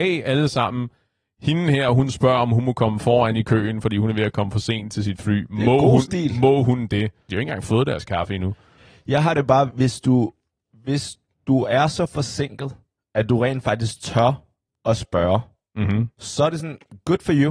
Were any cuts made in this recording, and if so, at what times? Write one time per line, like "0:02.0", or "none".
0:07.3